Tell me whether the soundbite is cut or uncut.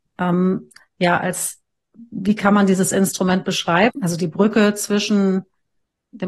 cut